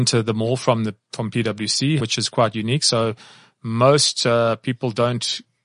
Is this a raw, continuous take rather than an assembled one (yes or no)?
no